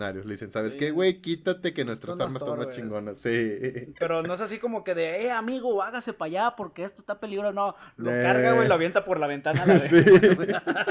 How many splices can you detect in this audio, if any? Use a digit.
0